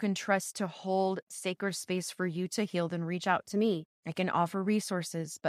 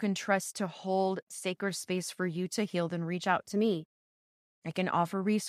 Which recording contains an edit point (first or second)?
first